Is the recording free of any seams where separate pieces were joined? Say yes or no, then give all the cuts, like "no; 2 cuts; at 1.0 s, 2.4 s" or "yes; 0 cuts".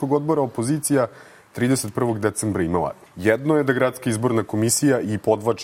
no; 1 cut; at 3.1 s